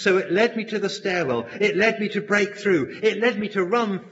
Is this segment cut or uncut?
uncut